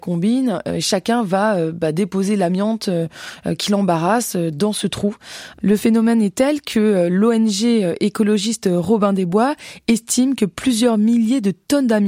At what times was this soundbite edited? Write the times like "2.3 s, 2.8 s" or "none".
none